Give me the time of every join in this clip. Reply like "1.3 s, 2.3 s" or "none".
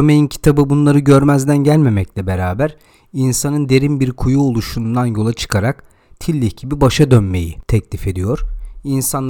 none